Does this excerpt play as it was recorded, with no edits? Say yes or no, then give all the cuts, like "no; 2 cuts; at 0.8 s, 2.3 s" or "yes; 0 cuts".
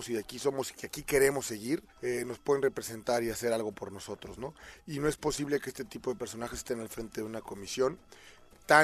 no; 1 cut; at 1.9 s